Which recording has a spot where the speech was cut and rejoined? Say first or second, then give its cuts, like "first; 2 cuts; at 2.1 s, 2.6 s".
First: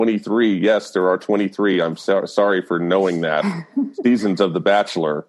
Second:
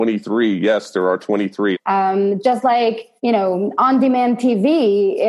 second; 2 cuts; at 1.7 s, 3.2 s